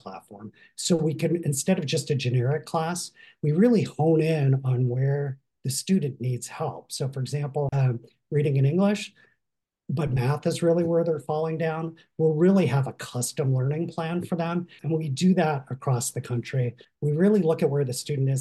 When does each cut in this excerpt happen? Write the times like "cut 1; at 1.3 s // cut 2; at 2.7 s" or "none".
cut 1; at 7.7 s // cut 2; at 14.8 s // cut 3; at 16.8 s